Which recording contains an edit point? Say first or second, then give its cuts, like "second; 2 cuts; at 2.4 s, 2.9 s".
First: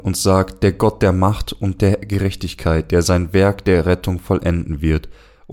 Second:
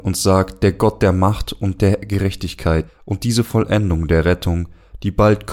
second; 1 cut; at 2.9 s